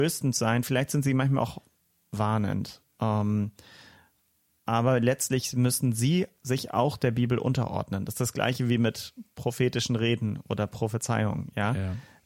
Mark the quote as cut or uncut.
uncut